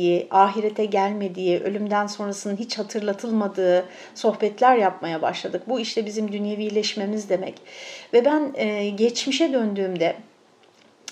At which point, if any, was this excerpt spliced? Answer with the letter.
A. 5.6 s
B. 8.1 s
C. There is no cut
C